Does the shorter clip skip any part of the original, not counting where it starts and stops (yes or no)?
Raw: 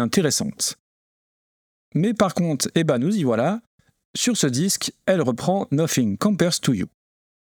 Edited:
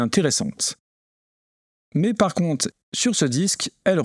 yes